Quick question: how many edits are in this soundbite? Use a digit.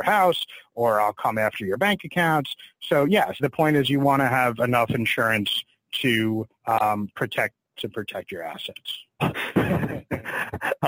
3